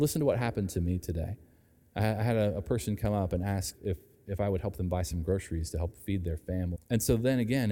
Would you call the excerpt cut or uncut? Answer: cut